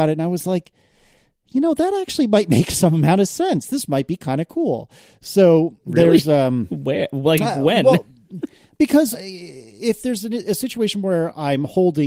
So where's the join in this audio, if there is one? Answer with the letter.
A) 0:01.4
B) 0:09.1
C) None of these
B